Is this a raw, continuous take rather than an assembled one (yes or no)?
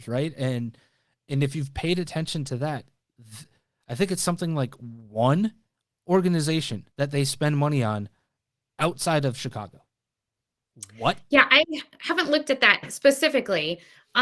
no